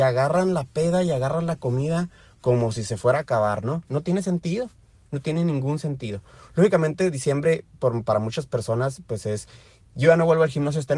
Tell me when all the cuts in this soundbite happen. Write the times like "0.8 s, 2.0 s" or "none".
3.9 s